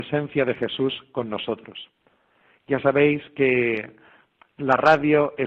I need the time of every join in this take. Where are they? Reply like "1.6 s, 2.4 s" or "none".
none